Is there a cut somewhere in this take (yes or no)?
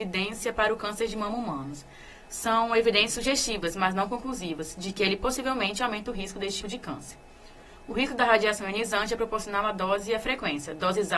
yes